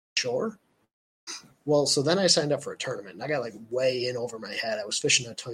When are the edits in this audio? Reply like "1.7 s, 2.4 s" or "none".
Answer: none